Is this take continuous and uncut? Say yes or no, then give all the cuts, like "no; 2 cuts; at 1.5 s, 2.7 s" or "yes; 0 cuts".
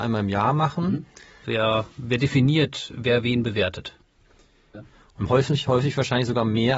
no; 2 cuts; at 1.4 s, 4.7 s